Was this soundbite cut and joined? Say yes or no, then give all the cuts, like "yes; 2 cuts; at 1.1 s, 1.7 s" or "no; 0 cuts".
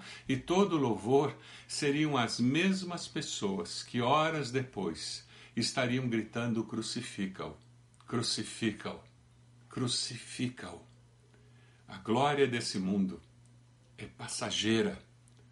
no; 0 cuts